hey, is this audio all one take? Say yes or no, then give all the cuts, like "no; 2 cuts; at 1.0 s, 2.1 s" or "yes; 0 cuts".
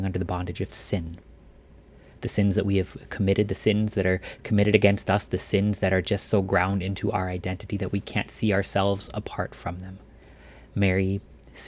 yes; 0 cuts